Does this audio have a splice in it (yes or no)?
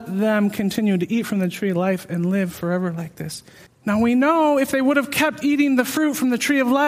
yes